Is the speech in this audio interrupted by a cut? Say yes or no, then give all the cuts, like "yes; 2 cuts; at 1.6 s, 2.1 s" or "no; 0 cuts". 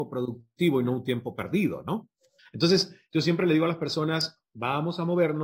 yes; 1 cut; at 2.4 s